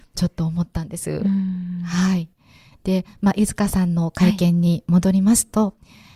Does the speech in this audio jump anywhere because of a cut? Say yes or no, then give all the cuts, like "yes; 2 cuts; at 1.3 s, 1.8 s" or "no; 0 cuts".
no; 0 cuts